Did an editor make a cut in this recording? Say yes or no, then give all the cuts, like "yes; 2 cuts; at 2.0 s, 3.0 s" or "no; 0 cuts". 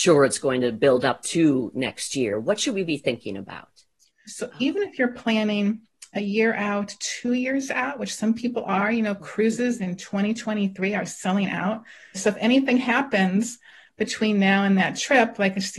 yes; 2 cuts; at 4.3 s, 12.1 s